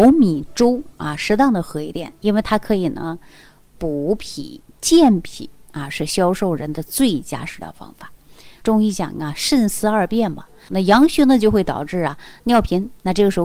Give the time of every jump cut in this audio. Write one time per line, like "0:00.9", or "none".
0:08.6
0:10.7